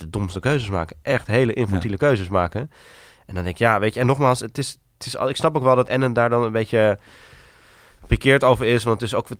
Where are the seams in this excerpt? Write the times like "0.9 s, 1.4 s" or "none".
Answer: none